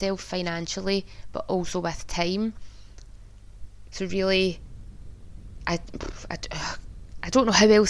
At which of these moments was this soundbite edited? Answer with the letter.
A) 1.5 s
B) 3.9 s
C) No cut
B